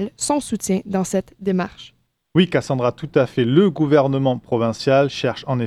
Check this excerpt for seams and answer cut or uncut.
uncut